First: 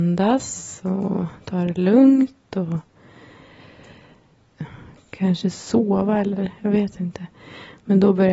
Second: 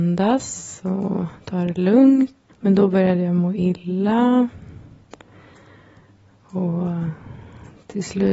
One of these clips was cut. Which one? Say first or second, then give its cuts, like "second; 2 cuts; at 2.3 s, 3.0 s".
second; 1 cut; at 2.5 s